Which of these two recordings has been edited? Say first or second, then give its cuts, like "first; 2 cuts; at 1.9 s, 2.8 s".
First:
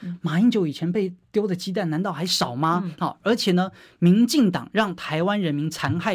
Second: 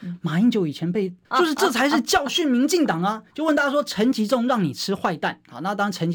second; 1 cut; at 1.2 s